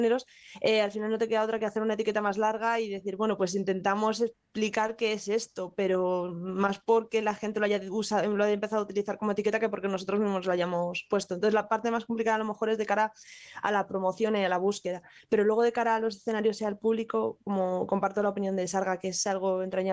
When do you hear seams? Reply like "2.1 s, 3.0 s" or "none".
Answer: none